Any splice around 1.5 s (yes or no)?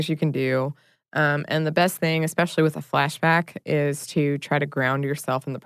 no